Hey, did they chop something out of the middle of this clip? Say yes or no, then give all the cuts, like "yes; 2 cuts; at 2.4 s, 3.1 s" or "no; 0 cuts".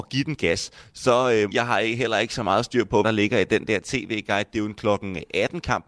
yes; 2 cuts; at 1.5 s, 3.0 s